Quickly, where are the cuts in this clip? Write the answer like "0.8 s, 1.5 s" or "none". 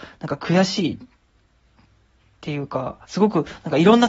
3.0 s